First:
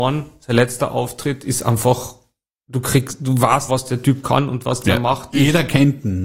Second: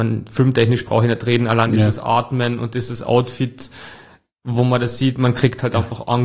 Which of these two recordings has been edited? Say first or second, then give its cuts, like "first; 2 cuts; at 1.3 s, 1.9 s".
first; 2 cuts; at 3.7 s, 5.3 s